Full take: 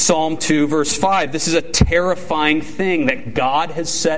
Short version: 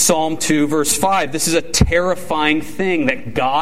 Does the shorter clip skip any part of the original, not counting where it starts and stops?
no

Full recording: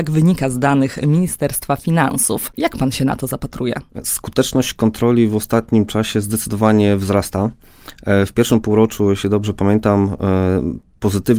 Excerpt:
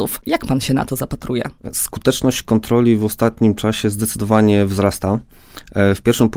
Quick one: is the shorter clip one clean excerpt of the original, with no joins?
yes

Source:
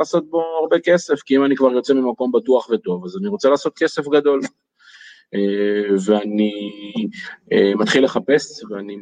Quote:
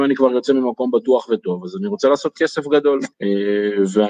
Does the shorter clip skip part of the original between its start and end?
yes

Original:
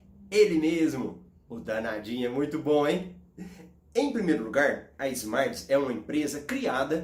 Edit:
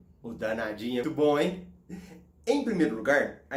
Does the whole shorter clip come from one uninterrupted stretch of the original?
no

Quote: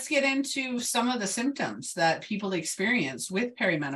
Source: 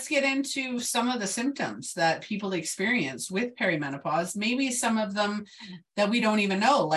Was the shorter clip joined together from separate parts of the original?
no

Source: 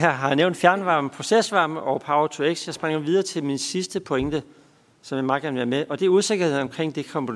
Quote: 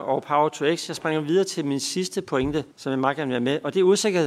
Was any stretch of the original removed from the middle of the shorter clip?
yes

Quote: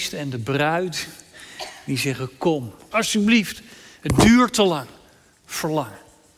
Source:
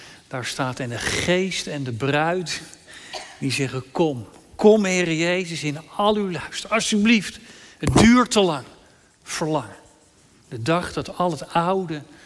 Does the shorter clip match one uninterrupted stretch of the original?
no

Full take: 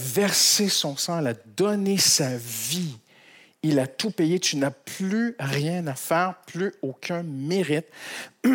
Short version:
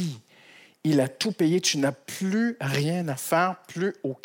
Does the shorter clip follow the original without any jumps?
yes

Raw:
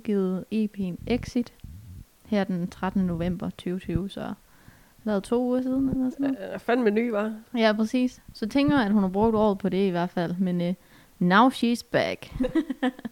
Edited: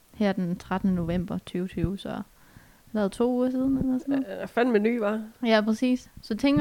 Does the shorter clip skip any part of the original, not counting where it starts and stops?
no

